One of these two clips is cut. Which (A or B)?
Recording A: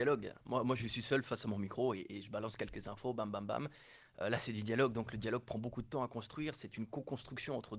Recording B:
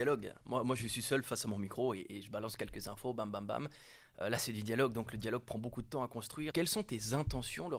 B